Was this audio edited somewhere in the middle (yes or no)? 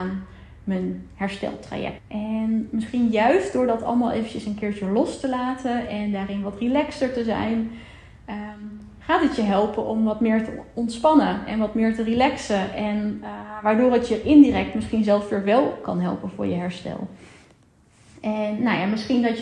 yes